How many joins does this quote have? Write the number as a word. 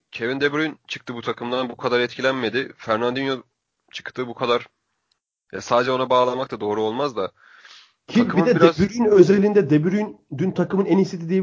zero